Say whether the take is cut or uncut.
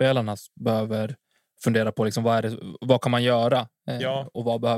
uncut